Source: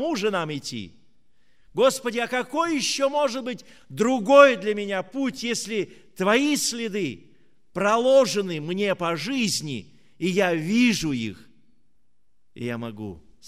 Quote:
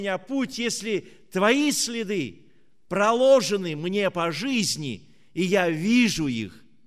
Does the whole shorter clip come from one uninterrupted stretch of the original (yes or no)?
yes